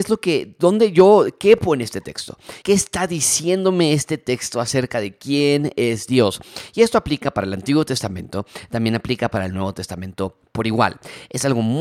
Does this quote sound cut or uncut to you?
cut